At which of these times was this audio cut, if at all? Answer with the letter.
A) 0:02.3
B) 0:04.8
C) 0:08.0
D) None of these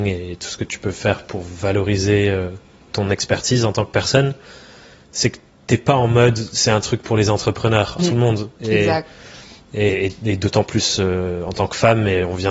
C